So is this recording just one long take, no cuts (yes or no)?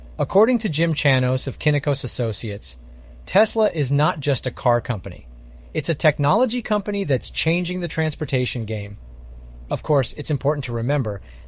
no